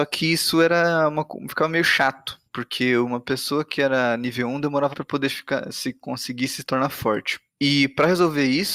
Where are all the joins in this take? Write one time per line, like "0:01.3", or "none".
0:02.5
0:04.9
0:07.5